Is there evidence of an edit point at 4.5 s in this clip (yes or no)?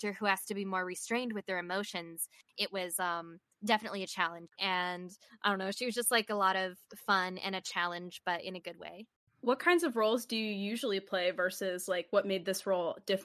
yes